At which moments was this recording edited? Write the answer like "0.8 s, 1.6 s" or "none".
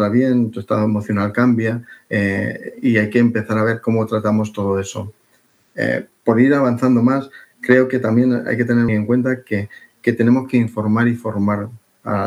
8.9 s